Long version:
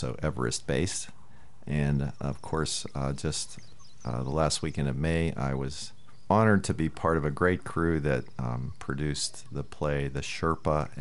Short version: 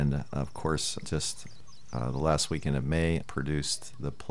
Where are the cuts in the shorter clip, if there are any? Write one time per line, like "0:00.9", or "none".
0:01.0
0:03.2